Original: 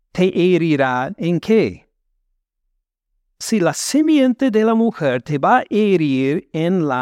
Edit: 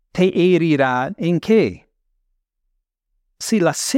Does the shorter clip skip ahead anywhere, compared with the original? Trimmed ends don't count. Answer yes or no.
no